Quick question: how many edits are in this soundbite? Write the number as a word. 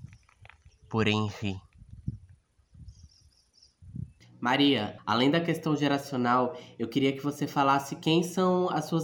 one